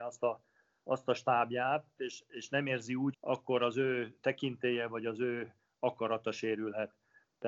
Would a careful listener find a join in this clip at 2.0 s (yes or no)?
yes